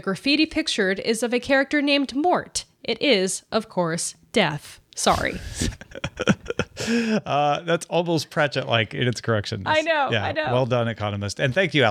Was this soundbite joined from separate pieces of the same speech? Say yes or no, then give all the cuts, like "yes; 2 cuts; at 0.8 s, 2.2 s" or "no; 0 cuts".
no; 0 cuts